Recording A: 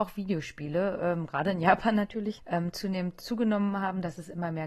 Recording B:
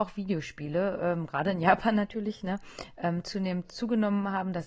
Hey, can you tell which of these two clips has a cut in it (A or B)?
A